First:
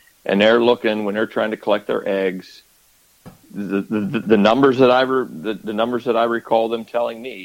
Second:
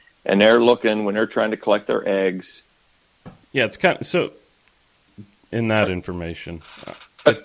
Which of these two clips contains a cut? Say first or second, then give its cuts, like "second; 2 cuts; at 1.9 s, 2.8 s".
second; 2 cuts; at 3.4 s, 5.5 s